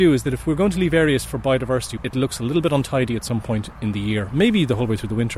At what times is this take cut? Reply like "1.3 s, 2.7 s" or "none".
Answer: 2.0 s